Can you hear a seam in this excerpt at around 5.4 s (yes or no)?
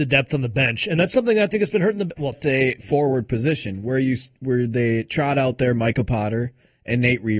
no